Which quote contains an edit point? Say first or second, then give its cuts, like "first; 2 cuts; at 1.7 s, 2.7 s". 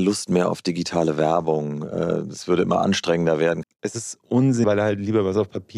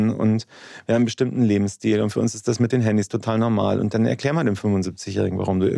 first; 2 cuts; at 3.6 s, 4.6 s